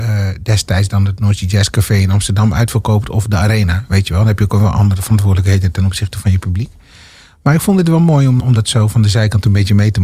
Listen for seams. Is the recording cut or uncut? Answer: cut